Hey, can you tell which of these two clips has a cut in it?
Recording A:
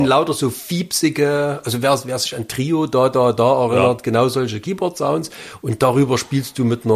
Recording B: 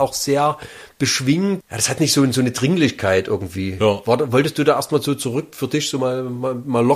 B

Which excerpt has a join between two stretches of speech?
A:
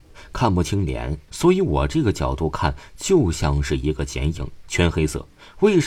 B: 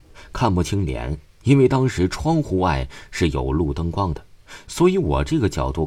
A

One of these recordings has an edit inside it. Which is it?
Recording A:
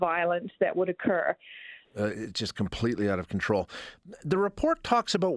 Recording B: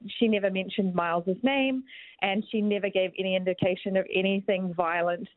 A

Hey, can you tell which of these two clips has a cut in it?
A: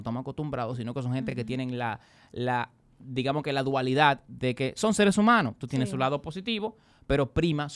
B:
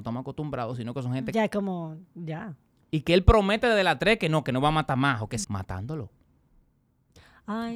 B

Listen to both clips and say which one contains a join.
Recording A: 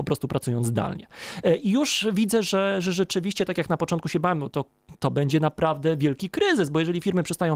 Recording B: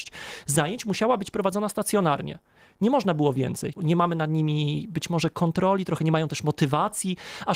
B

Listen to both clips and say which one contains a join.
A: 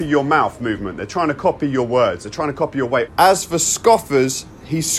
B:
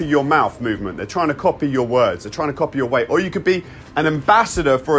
A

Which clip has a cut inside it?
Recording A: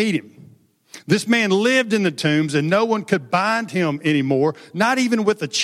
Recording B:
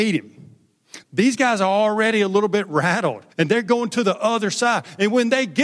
B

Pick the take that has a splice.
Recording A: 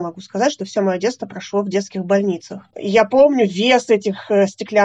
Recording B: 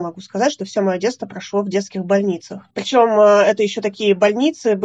A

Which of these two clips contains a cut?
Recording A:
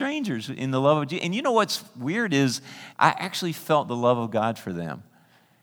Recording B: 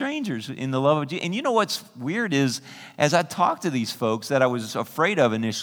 A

